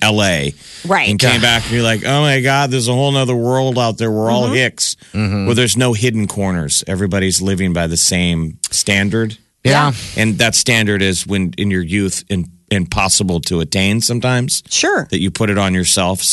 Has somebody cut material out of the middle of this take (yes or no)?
no